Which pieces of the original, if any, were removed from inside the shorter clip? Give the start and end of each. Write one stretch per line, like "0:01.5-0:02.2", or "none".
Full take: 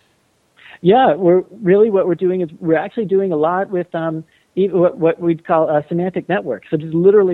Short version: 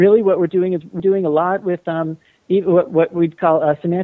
0:02.7-0:03.1